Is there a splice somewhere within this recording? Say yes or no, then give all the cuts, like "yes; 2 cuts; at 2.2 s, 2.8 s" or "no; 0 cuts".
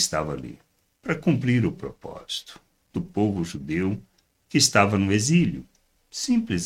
yes; 1 cut; at 2.9 s